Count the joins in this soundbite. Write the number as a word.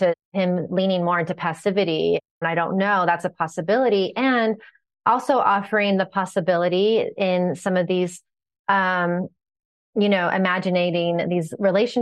one